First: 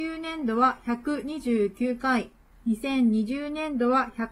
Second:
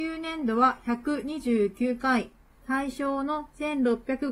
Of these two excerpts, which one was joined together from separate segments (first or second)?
second